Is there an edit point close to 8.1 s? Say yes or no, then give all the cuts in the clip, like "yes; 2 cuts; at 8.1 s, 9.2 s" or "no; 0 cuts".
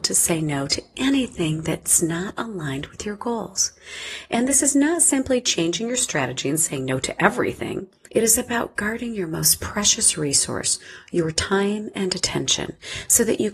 yes; 1 cut; at 8.1 s